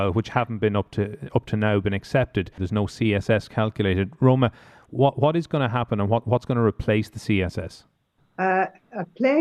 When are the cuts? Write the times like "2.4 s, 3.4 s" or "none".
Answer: 2.6 s